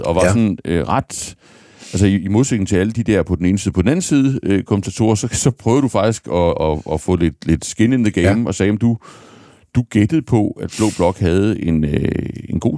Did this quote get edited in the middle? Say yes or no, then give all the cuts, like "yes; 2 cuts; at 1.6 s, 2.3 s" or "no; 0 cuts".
no; 0 cuts